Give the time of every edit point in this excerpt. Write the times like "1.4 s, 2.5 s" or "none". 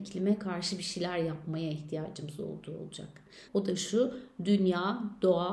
3.5 s

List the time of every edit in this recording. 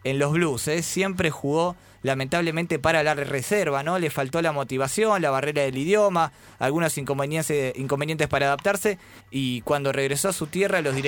9.2 s

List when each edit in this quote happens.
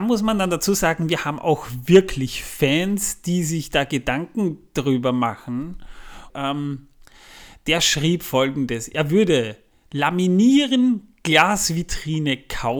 6.3 s

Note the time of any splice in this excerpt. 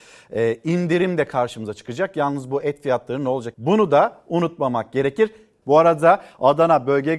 3.5 s, 5.6 s

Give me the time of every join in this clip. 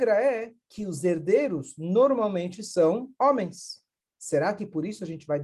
4.0 s

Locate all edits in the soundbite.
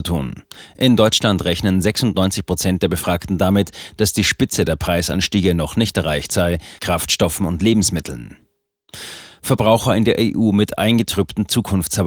6.8 s

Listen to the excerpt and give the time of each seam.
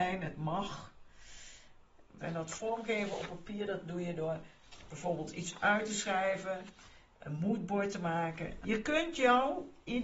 2.2 s, 8.6 s

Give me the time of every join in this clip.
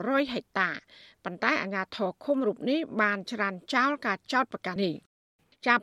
4.8 s

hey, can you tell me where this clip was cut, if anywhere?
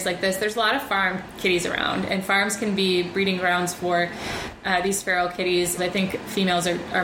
5.8 s

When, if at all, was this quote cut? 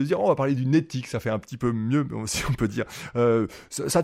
none

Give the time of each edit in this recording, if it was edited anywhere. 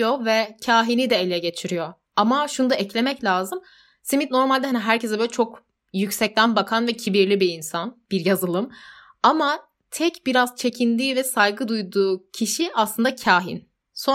none

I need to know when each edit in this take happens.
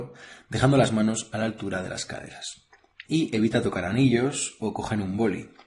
3.1 s

